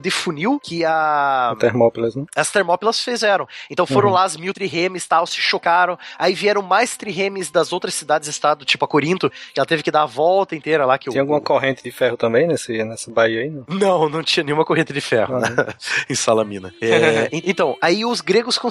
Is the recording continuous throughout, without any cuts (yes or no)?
yes